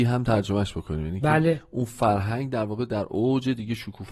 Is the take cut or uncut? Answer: uncut